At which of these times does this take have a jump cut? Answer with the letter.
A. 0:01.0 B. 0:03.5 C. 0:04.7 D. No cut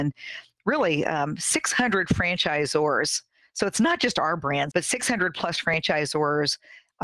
C